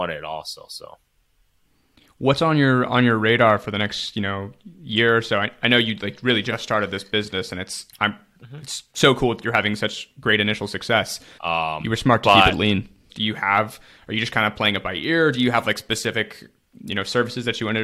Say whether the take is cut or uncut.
cut